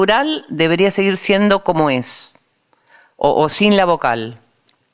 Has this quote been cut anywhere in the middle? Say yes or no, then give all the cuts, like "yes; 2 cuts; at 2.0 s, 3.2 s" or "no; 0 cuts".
no; 0 cuts